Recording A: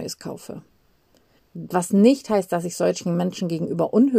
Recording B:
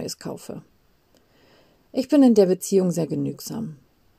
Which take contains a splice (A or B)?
A